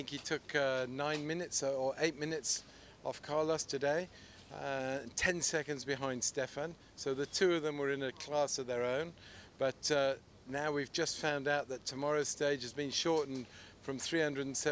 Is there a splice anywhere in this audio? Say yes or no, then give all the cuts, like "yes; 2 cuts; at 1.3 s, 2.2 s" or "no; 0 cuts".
no; 0 cuts